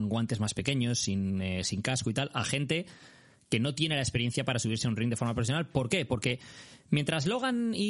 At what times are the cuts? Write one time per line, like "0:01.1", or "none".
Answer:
none